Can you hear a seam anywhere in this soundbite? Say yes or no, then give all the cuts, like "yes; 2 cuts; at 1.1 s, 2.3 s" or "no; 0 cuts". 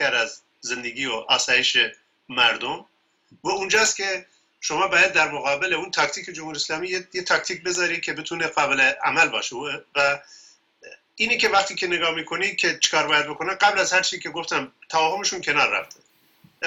no; 0 cuts